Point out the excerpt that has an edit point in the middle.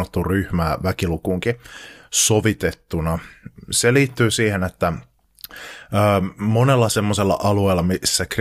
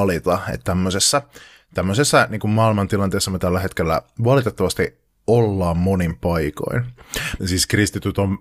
second; 1 cut; at 7.4 s

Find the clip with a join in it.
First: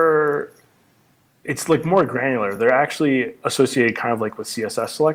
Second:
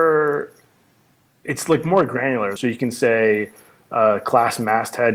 second; 1 cut; at 2.6 s

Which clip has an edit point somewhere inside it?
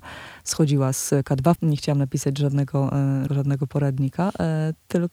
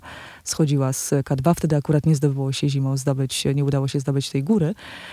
first; 2 cuts; at 1.6 s, 3.3 s

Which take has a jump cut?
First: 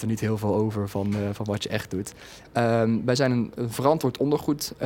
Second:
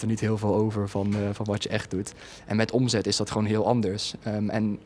first; 2 cuts; at 2.4 s, 3.6 s

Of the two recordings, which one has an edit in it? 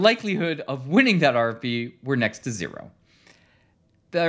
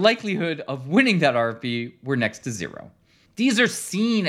second; 1 cut; at 3.3 s

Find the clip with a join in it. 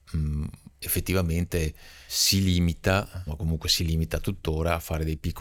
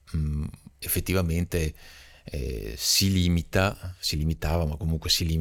first; 2 cuts; at 2.1 s, 3.3 s

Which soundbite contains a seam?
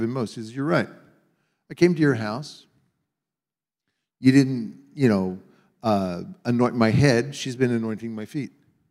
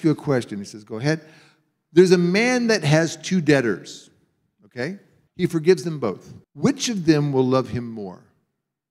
second; 2 cuts; at 5.3 s, 6.4 s

